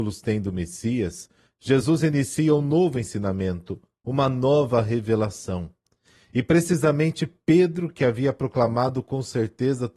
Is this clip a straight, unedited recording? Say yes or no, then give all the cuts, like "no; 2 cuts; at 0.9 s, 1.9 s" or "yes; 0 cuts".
yes; 0 cuts